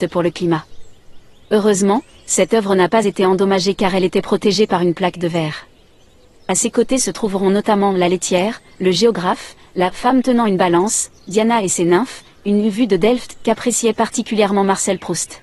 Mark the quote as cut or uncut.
uncut